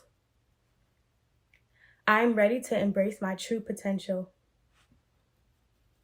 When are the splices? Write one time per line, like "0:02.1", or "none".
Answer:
0:02.0